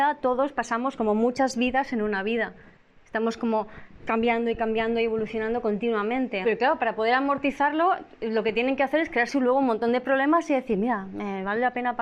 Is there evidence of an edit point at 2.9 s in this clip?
no; 1 cut; at 6.4 s

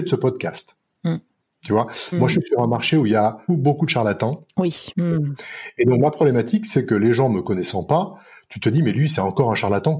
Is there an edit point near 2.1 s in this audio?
yes; 3 cuts; at 2.1 s, 3.5 s, 4.9 s

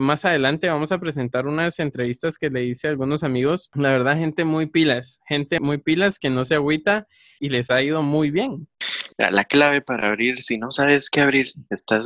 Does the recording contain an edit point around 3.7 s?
no; 3 cuts; at 5.6 s, 7.4 s, 9.1 s

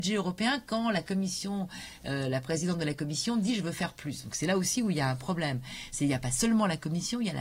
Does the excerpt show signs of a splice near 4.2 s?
no; 0 cuts

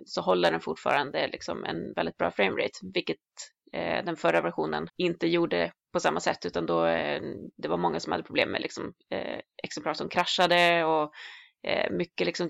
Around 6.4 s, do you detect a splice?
no; 1 cut; at 4.9 s

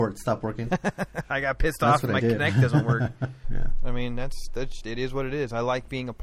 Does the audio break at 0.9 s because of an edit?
no; 2 cuts; at 3.4 s, 4.8 s

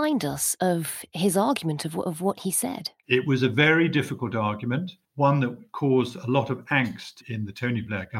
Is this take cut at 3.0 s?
yes; 2 cuts; at 3.0 s, 5.0 s

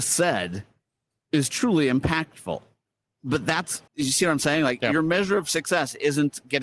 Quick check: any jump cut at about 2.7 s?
no; 1 cut; at 3.9 s

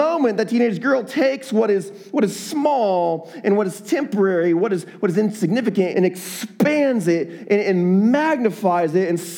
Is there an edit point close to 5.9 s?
yes; 1 cut; at 5.9 s

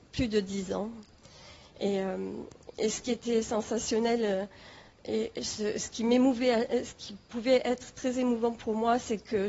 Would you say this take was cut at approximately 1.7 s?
no; 0 cuts

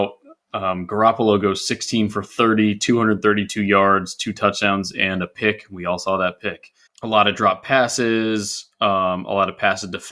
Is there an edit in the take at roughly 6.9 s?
yes; 1 cut; at 6.9 s

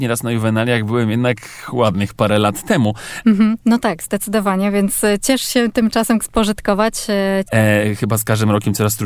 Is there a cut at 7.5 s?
yes; 3 cuts; at 3.2 s, 6.2 s, 7.5 s

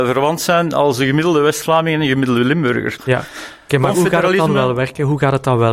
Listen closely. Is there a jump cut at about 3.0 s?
yes; 1 cut; at 3.0 s

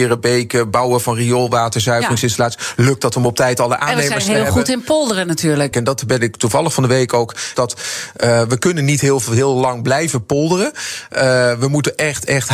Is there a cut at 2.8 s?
no; 2 cuts; at 5.7 s, 7.5 s

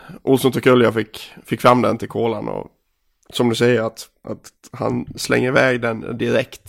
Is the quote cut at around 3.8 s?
no; 0 cuts

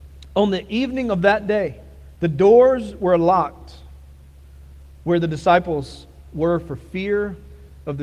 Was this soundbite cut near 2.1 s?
yes; 1 cut; at 2.1 s

